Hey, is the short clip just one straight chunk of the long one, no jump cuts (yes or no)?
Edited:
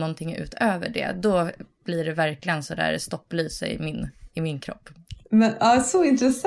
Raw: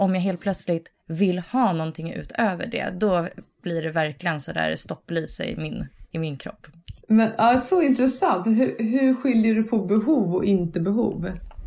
yes